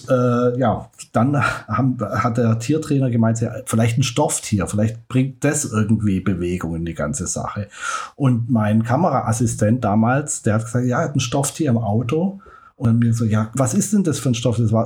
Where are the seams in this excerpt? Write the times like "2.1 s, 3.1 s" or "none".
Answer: none